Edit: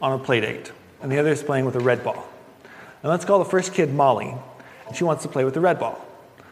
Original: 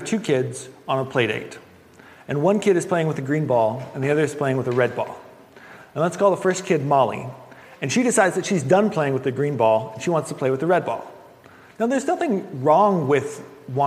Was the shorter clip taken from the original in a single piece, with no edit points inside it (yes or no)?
no